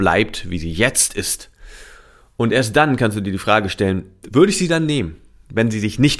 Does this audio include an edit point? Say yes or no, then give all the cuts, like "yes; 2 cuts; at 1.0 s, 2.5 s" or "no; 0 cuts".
no; 0 cuts